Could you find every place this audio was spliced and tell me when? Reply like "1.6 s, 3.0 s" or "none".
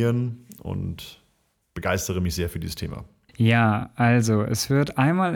3.3 s